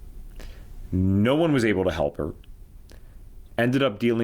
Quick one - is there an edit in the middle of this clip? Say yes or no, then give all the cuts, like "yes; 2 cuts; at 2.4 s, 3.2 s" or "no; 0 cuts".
no; 0 cuts